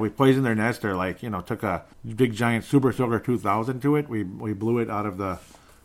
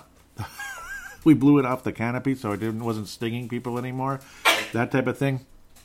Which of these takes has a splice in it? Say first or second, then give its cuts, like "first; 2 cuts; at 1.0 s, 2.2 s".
first; 1 cut; at 1.9 s